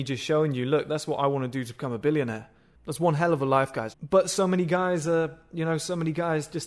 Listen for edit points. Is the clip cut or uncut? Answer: cut